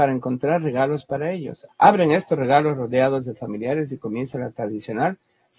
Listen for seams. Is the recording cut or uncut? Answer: cut